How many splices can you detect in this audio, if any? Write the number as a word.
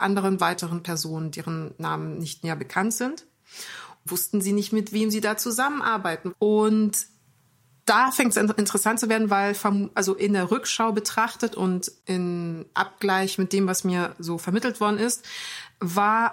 two